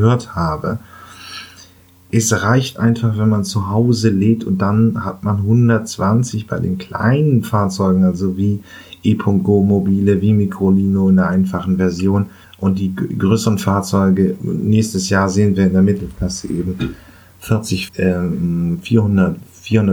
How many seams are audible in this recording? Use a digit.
2